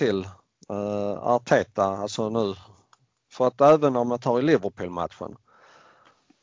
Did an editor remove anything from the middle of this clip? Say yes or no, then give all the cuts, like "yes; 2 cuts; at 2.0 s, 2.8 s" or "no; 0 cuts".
no; 0 cuts